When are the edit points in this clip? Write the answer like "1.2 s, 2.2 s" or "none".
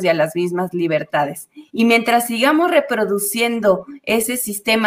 1.7 s